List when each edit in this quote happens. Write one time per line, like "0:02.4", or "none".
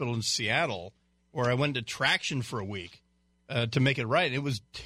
none